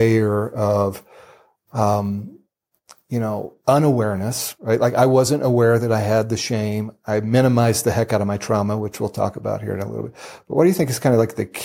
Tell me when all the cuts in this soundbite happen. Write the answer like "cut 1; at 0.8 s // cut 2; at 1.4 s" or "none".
none